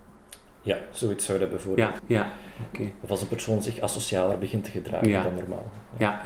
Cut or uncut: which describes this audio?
cut